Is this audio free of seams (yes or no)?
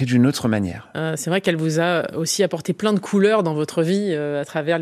no